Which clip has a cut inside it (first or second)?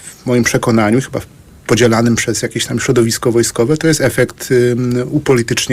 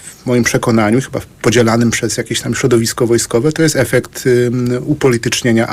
second